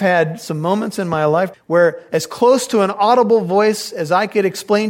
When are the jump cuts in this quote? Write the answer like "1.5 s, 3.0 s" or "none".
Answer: 1.5 s

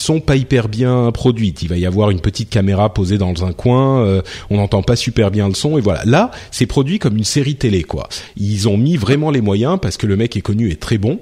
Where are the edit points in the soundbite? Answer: none

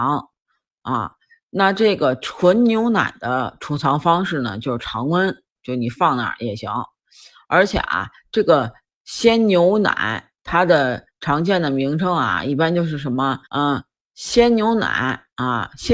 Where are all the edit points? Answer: 13.5 s

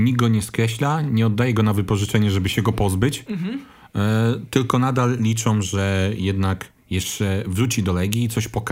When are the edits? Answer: none

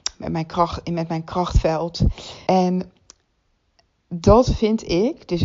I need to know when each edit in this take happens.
2.5 s

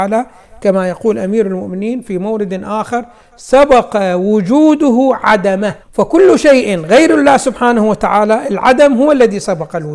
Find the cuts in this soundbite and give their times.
5.8 s

